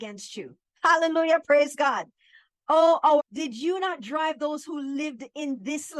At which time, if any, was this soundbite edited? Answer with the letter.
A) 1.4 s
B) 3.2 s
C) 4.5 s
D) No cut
B